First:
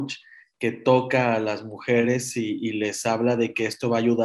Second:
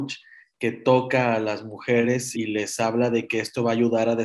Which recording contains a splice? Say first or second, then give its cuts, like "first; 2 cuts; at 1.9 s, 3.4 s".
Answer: second; 1 cut; at 2.3 s